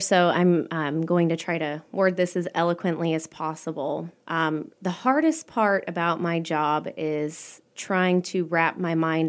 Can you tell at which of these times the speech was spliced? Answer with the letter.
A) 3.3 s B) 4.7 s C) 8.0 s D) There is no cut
B